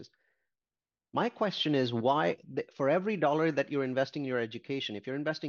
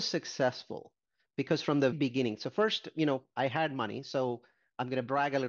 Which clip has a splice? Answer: second; 1 cut; at 1.9 s

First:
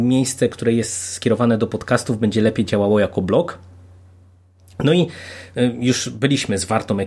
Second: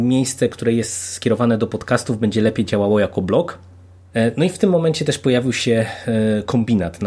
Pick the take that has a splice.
second; 1 cut; at 4.1 s

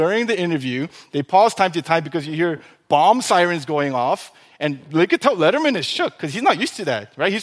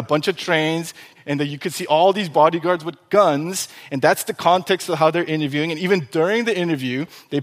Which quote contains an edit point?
second; 1 cut; at 1.2 s

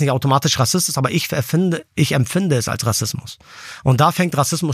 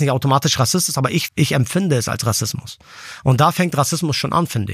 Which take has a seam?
second; 1 cut; at 1.3 s

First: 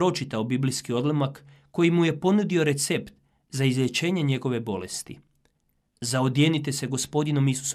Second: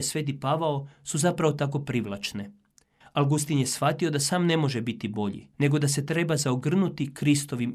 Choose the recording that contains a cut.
second; 2 cuts; at 3.0 s, 5.5 s

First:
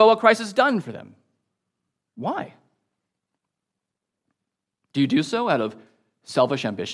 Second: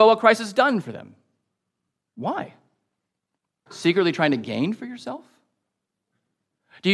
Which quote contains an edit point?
second; 1 cut; at 3.7 s

